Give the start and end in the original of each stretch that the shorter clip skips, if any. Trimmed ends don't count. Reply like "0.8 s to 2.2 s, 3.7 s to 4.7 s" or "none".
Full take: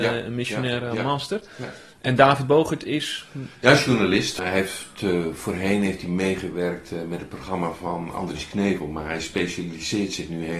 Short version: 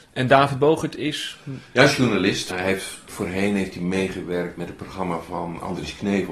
5.0 s to 5.4 s, 6.8 s to 7.1 s